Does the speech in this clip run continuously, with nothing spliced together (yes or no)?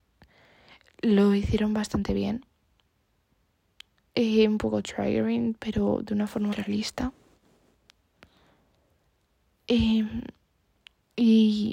no